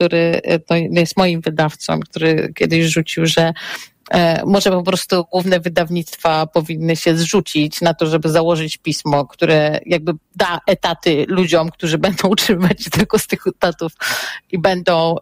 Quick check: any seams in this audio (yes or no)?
no